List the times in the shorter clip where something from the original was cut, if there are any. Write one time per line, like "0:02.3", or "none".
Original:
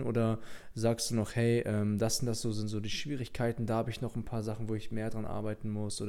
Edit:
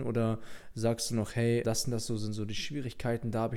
0:01.6

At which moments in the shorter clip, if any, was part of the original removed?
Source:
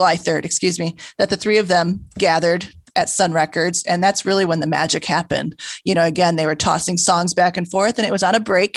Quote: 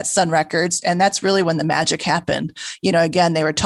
none

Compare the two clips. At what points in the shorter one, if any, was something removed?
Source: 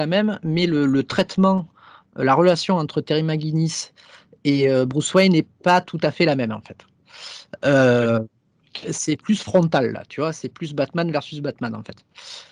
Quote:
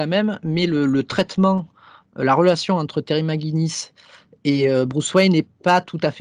none

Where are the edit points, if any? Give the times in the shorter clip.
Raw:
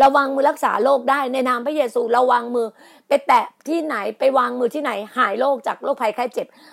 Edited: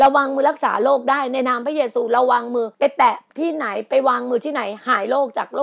0:02.7

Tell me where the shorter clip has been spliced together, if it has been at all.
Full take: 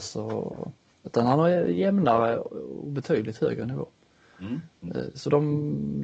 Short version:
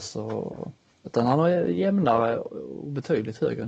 none

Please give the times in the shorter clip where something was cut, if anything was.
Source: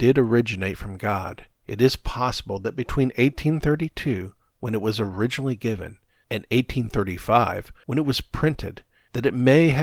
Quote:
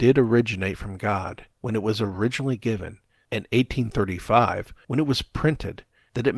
0:01.5

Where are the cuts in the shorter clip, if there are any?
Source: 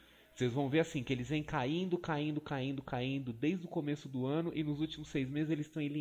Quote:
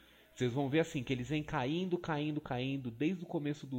0:02.4

